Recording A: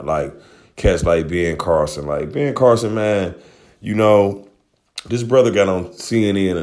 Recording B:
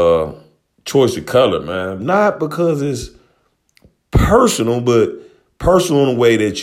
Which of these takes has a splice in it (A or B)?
B